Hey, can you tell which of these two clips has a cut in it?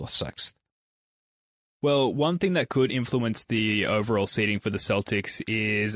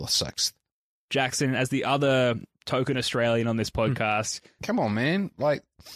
second; 2 cuts; at 1.0 s, 4.6 s

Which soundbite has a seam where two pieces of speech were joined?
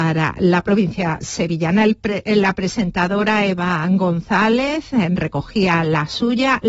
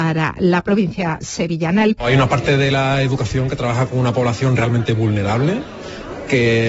second; 1 cut; at 2.0 s

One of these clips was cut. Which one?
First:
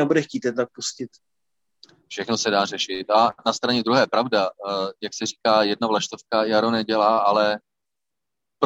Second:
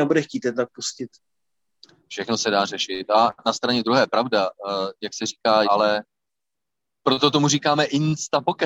second; 1 cut; at 5.6 s

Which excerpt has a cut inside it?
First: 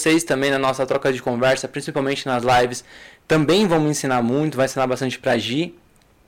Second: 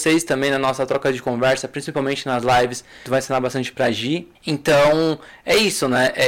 second; 2 cuts; at 3.1 s, 4.4 s

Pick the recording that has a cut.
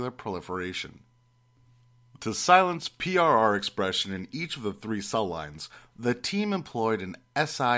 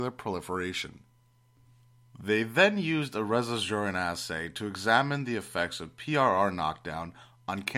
first; 1 cut; at 2.2 s

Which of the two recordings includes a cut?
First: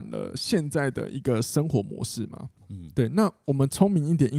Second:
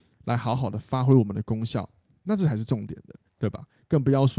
second; 1 cut; at 3.3 s

